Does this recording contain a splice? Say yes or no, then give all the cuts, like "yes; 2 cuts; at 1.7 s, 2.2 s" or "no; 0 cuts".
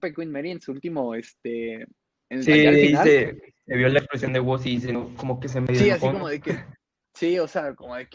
no; 0 cuts